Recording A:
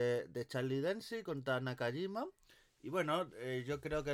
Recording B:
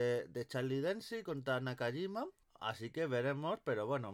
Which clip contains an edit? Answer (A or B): B